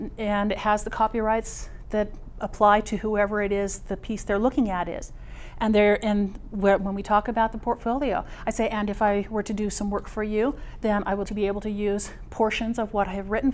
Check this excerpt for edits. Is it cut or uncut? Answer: cut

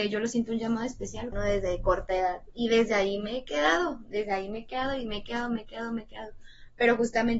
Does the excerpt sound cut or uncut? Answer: cut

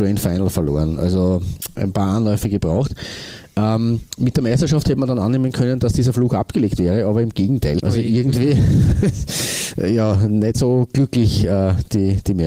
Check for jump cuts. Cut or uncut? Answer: cut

